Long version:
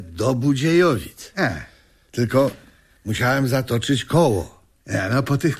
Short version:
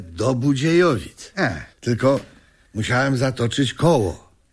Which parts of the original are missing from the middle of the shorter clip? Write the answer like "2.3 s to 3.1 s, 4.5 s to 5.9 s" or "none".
1.7 s to 2.0 s